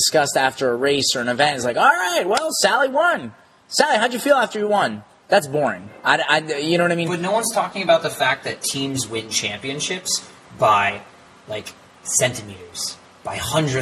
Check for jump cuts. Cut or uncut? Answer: uncut